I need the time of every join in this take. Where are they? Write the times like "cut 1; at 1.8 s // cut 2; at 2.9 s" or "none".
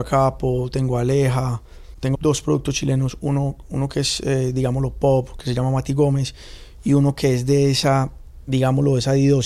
cut 1; at 2.1 s